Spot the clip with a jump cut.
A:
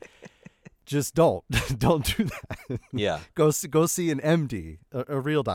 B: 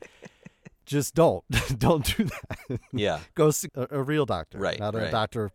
B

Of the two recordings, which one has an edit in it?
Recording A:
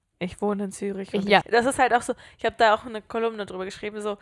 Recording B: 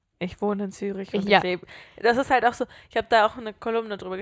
A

